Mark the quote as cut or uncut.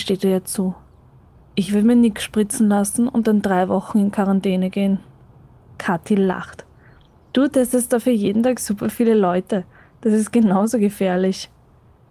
uncut